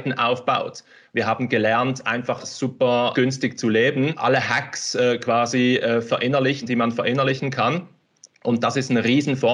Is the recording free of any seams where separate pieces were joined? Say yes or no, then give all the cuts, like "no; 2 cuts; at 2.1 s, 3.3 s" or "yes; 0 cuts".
yes; 0 cuts